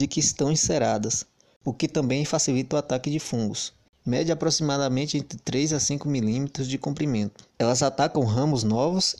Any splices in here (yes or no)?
yes